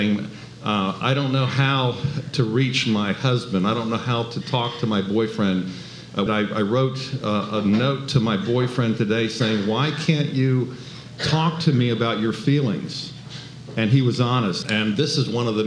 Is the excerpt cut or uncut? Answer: cut